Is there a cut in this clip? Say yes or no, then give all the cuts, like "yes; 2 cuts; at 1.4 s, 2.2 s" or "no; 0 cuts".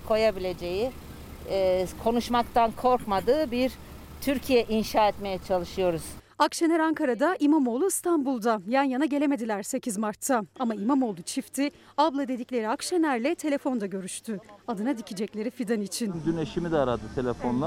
no; 0 cuts